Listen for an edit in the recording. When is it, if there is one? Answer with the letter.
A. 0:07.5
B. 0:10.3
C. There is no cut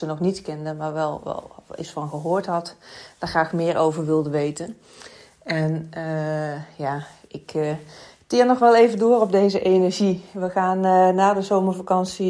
C